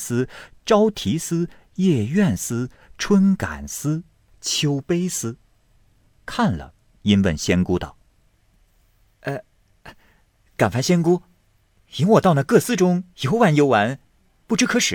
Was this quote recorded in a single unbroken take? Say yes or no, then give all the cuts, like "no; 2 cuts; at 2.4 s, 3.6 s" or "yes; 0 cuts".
no; 1 cut; at 13.1 s